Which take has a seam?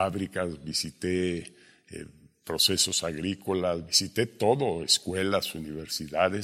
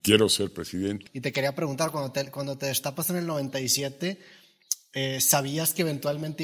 second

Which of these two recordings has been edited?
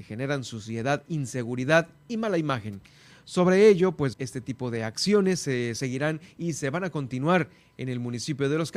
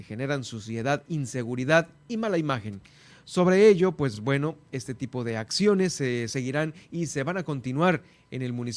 first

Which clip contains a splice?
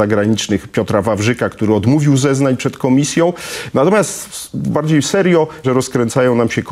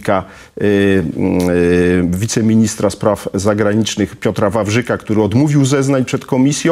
first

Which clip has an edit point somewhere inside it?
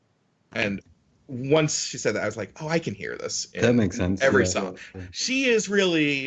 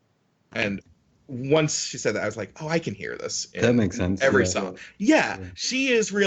first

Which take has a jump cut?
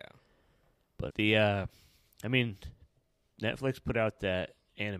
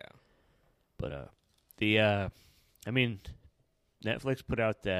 first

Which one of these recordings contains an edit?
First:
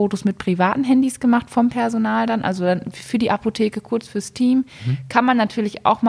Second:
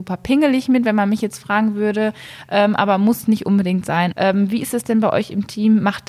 second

